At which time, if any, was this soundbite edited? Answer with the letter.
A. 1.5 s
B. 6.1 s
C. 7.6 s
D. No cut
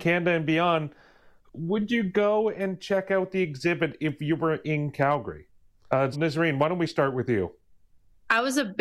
B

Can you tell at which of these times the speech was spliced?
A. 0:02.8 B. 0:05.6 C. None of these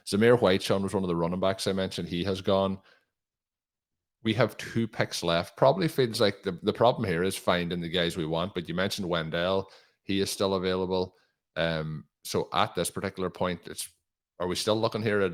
C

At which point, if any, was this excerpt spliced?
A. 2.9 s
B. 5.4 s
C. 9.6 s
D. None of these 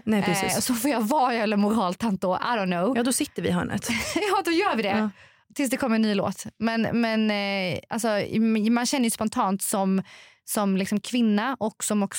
D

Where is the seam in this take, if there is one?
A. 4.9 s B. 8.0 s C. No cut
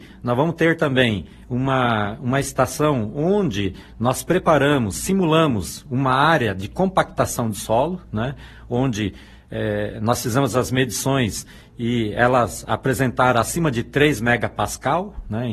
C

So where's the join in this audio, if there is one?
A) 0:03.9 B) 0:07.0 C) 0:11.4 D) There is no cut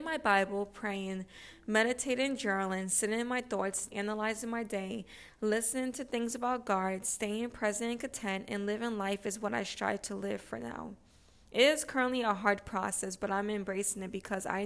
A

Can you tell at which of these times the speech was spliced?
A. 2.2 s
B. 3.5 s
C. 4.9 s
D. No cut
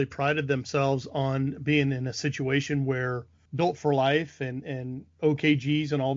B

